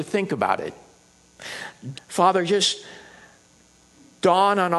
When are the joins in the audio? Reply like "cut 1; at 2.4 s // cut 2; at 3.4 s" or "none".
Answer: cut 1; at 1.9 s